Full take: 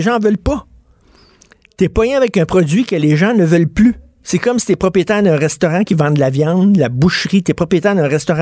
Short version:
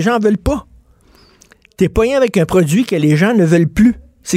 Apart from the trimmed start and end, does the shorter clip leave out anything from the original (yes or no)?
no